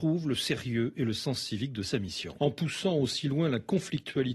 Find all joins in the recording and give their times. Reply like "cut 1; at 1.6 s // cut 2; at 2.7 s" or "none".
cut 1; at 2.4 s